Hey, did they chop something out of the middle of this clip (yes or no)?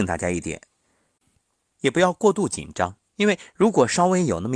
yes